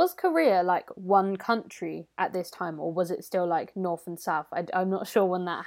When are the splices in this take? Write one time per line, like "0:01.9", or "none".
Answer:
none